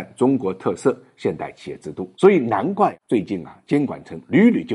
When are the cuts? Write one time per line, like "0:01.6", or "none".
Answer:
0:02.1